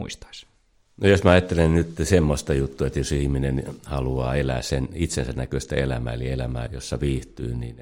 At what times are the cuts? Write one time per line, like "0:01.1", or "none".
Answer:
0:06.7